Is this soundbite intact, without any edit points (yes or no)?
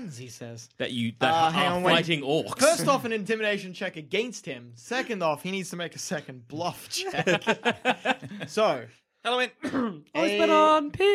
yes